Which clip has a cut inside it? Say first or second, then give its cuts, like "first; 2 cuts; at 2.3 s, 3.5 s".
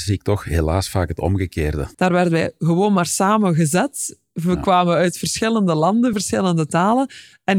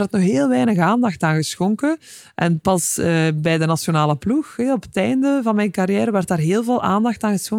first; 2 cuts; at 1.9 s, 6.1 s